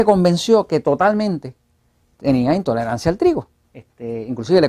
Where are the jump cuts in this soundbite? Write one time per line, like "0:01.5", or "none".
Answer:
0:03.6